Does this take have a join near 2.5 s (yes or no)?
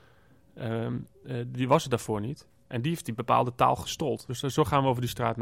yes